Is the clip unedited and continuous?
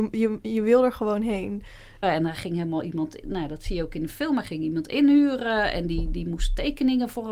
no; 1 cut; at 2.0 s

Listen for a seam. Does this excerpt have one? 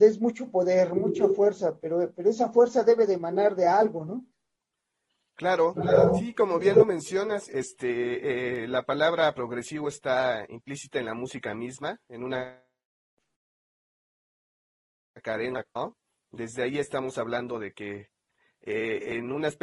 no; 0 cuts

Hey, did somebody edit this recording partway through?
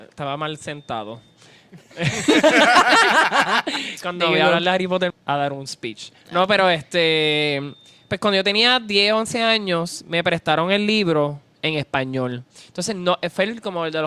yes; 1 cut; at 5.1 s

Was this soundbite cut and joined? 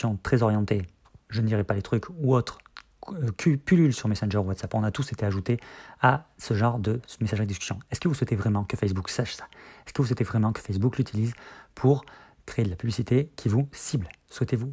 no; 0 cuts

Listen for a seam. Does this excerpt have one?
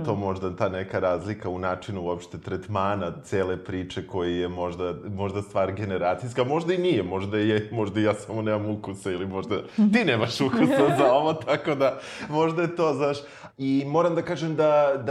yes; 1 cut; at 13.5 s

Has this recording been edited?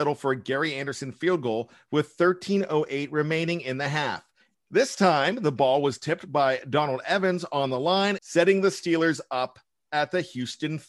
yes; 2 cuts; at 4.5 s, 8.2 s

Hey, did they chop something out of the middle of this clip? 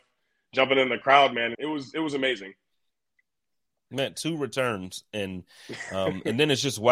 yes; 1 cut; at 1.5 s

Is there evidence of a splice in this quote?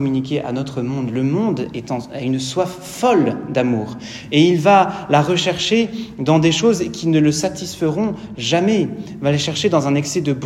no; 0 cuts

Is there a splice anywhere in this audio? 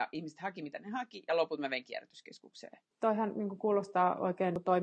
yes; 1 cut; at 2.9 s

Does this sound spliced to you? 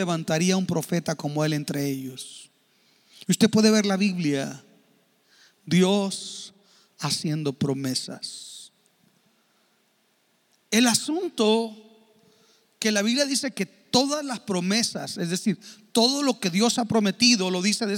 no; 0 cuts

